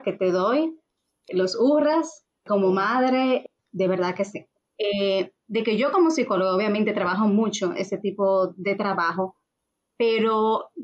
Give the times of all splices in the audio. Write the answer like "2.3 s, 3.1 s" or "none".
4.6 s